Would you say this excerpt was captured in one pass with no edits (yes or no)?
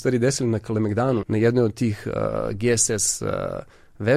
no